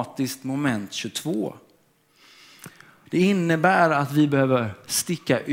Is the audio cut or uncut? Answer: cut